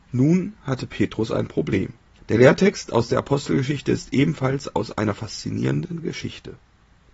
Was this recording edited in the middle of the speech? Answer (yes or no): yes